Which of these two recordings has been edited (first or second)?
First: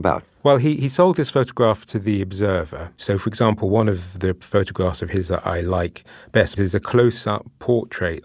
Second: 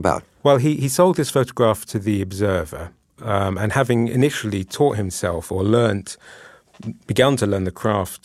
first